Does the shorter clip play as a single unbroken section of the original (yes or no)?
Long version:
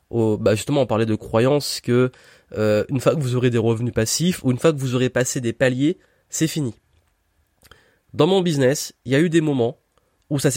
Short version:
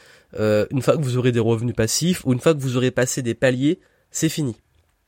yes